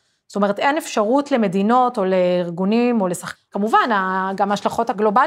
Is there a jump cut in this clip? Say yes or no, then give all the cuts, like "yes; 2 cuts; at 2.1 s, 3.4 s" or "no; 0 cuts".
yes; 1 cut; at 3.3 s